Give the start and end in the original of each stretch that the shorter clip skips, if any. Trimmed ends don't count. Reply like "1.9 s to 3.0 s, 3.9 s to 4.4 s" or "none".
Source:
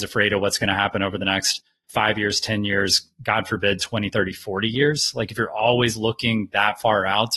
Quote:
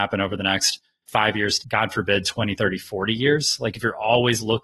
2.4 s to 3.1 s

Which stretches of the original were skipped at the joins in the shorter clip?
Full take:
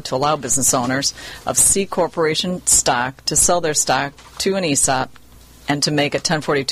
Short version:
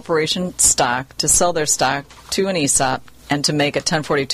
5.3 s to 5.6 s

